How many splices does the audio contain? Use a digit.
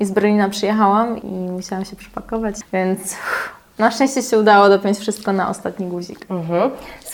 2